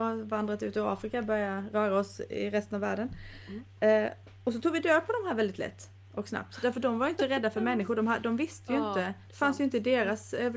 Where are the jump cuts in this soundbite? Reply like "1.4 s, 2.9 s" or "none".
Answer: none